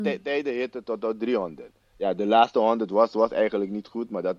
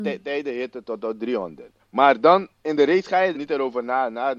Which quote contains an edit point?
second; 2 cuts; at 1.8 s, 3.3 s

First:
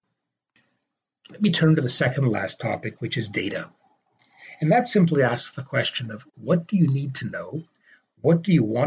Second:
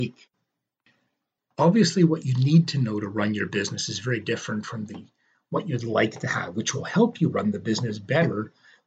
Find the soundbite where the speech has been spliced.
second; 1 cut; at 1.4 s

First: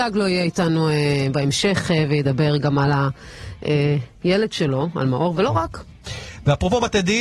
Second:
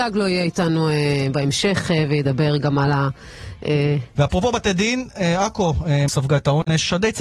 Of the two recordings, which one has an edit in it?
second; 2 cuts; at 4.1 s, 6.1 s

